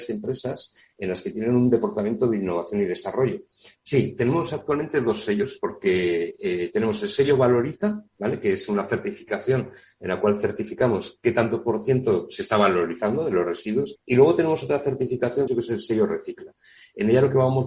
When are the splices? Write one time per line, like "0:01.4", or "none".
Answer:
0:03.8
0:14.0
0:15.5